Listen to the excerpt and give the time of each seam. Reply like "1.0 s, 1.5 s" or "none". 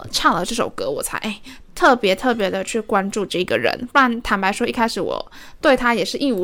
none